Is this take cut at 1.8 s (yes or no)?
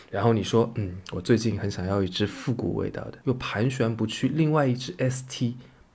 no